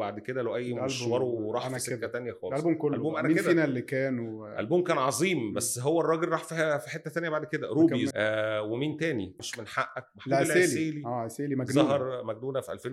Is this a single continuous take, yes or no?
no